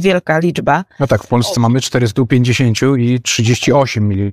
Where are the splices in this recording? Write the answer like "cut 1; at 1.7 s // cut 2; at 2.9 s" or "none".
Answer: none